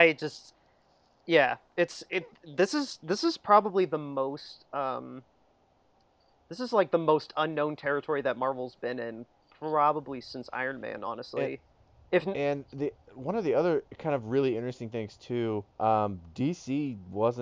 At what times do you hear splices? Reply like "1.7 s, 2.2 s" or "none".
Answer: 13.0 s, 15.7 s